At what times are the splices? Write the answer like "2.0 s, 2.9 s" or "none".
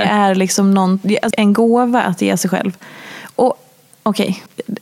1.3 s